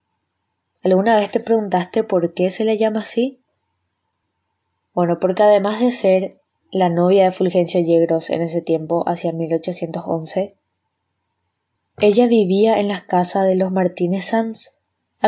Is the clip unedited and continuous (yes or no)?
yes